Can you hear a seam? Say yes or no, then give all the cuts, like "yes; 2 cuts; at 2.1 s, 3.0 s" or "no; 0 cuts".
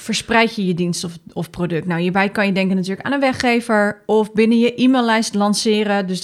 no; 0 cuts